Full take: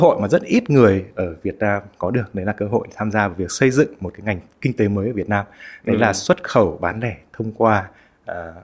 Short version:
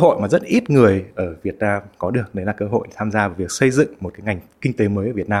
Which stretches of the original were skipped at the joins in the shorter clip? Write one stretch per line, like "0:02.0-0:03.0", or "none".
none

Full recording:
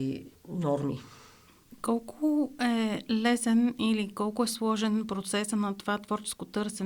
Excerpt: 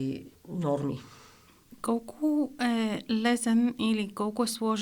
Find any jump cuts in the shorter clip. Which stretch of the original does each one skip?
none

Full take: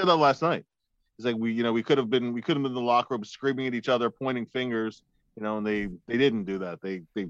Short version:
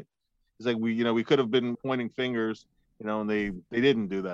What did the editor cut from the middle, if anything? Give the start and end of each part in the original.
0:02.3-0:04.1

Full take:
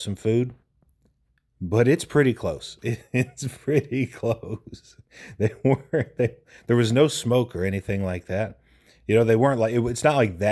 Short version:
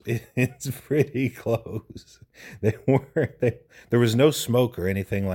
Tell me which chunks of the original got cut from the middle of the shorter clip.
none

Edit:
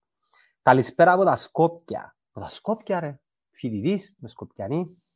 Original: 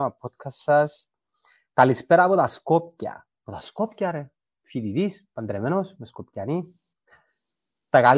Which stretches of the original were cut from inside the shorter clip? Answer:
0:05.3-0:06.0

